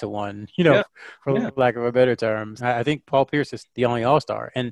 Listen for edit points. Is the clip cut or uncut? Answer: cut